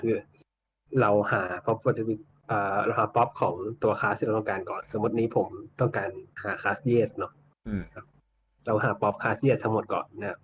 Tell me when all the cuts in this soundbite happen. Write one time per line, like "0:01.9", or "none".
0:06.3